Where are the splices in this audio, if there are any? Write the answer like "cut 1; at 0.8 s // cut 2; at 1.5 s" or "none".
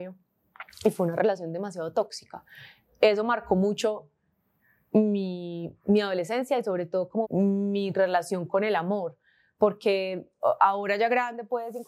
cut 1; at 7.2 s